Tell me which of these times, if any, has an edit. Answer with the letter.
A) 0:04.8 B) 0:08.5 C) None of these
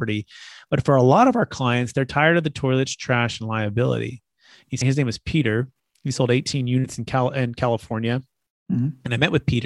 A